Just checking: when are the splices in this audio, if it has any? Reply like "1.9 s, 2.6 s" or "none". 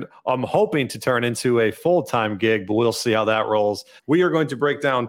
4.0 s